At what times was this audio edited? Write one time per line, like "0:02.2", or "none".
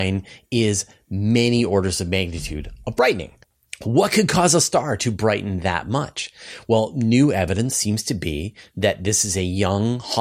none